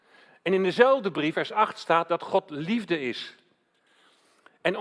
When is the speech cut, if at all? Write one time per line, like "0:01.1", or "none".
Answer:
0:01.3